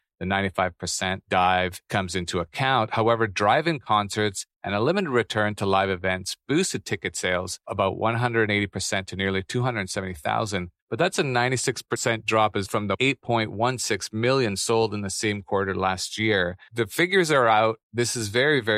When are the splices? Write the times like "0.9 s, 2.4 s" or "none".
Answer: 10.8 s, 12.6 s